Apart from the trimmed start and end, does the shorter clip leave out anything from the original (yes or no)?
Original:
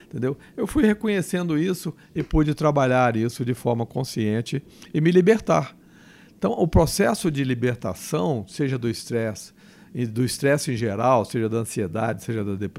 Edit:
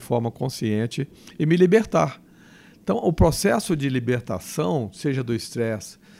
no